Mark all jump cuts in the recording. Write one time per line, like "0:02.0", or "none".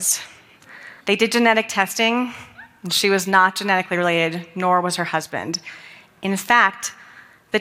0:01.0